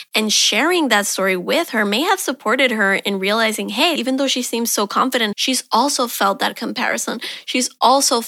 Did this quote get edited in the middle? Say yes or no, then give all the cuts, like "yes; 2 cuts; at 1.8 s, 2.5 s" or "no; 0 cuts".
yes; 2 cuts; at 4.0 s, 5.3 s